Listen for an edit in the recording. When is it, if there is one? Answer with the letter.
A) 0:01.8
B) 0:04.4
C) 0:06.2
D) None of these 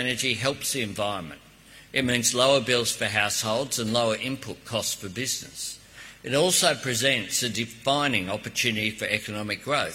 D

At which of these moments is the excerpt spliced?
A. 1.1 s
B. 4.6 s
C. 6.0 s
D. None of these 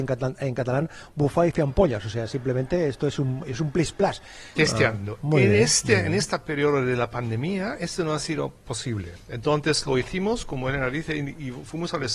B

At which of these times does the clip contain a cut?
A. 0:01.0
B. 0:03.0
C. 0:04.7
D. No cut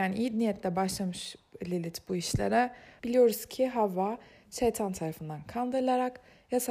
B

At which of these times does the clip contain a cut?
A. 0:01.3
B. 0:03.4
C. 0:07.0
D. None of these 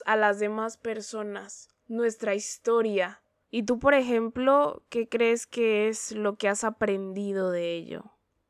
B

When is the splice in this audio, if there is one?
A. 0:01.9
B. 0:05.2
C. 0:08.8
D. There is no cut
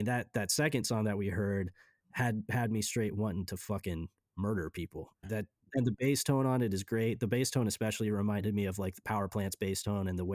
B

